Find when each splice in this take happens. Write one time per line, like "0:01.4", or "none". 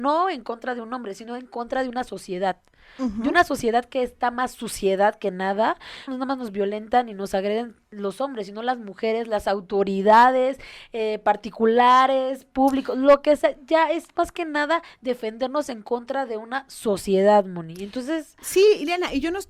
0:06.1